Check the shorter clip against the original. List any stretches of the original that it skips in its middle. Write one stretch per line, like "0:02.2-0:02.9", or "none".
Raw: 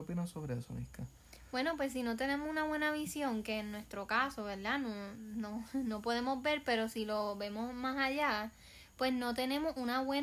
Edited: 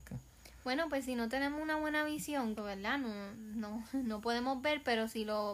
0:03.4-0:04.4